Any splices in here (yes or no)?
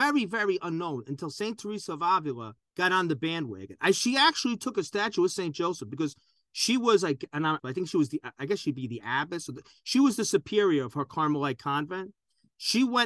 yes